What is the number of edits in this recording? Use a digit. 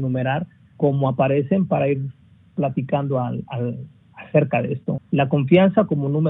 1